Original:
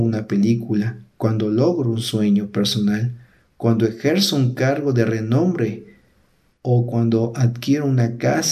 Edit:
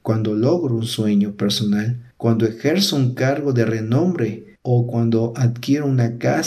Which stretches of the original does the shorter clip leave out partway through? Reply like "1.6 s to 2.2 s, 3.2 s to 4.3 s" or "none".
3.3 s to 3.5 s, 6.0 s to 6.5 s